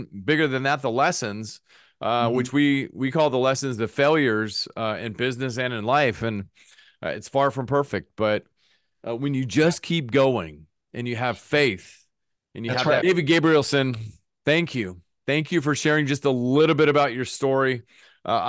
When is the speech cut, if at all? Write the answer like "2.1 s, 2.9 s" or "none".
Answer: 13.0 s